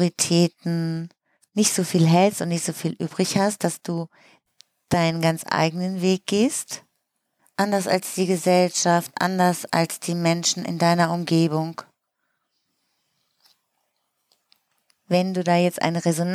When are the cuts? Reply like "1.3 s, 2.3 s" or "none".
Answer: 7.4 s